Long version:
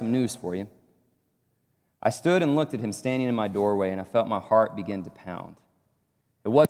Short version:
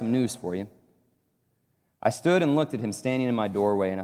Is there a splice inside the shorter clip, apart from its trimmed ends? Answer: no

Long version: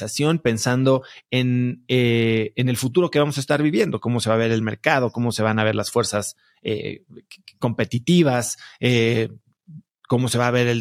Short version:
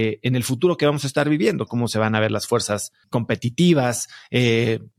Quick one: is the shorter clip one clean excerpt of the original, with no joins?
no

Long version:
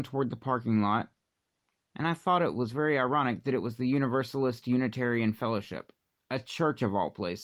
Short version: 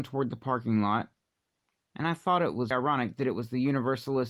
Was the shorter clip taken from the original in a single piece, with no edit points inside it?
no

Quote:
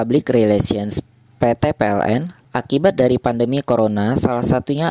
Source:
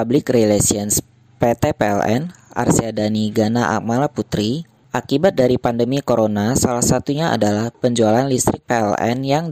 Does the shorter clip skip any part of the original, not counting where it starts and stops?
yes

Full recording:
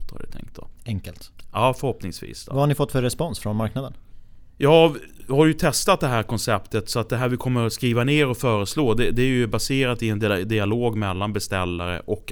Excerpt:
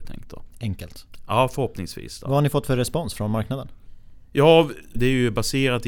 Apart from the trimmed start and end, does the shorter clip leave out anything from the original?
yes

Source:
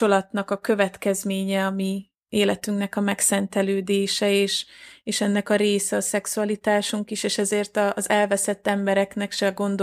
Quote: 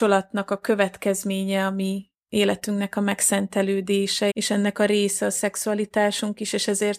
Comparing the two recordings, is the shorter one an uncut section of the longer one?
no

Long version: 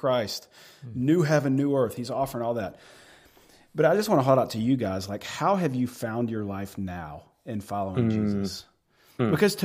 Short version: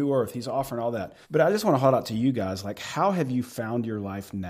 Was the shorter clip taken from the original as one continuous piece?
no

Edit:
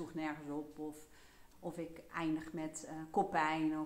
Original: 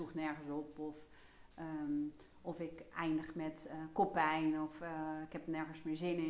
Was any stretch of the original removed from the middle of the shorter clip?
yes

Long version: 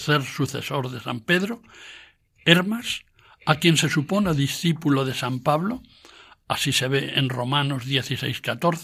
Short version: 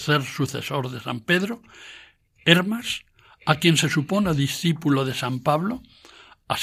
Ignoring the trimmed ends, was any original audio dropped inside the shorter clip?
no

